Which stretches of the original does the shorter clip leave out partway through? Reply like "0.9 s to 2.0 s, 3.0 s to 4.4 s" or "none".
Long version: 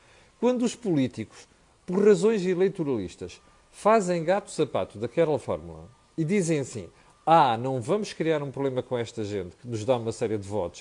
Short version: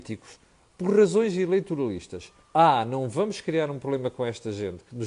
3.5 s to 7.1 s